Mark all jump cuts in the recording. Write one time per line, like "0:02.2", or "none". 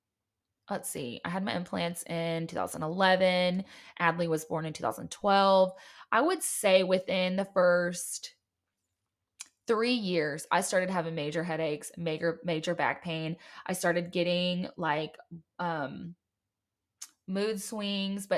none

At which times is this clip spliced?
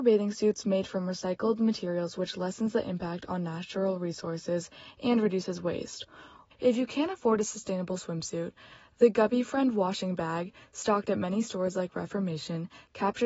0:06.5

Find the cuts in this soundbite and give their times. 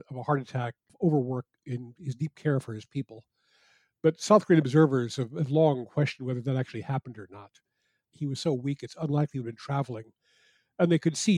0:08.1

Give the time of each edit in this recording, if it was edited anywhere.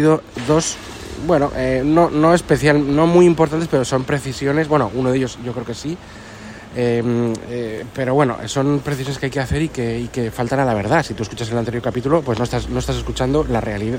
none

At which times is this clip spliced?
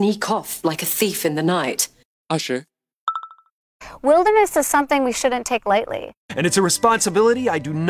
0:06.2

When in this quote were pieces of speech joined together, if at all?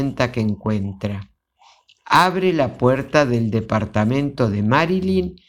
none

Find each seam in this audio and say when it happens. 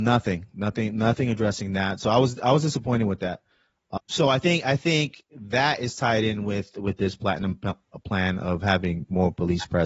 0:04.0

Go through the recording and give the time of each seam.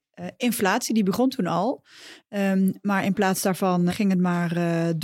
0:02.2
0:03.9

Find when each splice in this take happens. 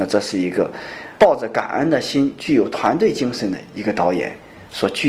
0:01.2

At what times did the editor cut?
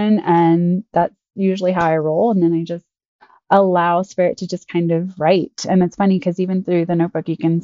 none

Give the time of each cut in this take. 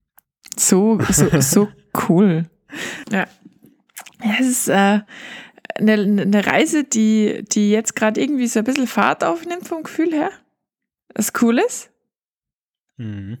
0:03.0

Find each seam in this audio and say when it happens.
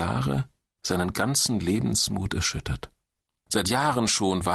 0:03.4

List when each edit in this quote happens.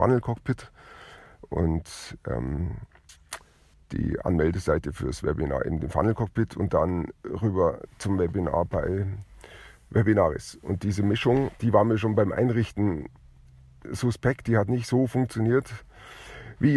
0:11.6

